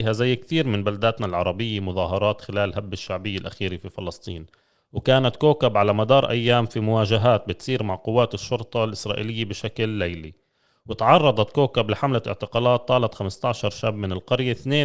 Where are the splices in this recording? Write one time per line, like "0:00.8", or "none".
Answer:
none